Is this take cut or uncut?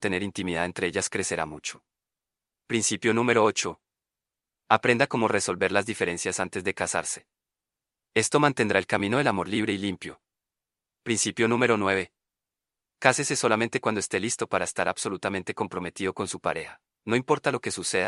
uncut